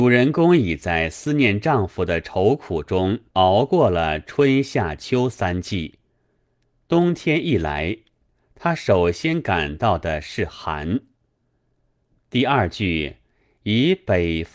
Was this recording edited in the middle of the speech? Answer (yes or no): yes